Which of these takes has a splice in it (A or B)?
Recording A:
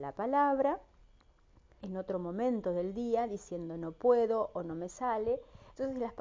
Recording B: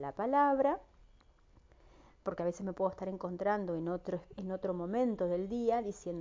A